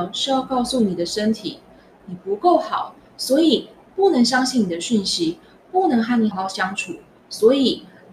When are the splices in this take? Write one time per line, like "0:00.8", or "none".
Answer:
0:02.0
0:06.3